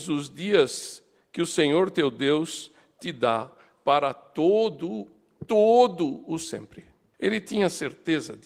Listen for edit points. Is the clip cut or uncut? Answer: cut